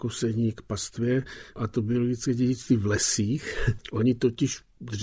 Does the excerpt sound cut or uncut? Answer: uncut